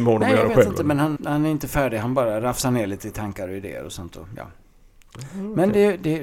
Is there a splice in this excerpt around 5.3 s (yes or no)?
no